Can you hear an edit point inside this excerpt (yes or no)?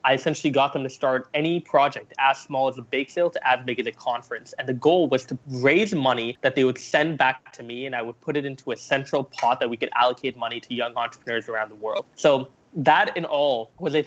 no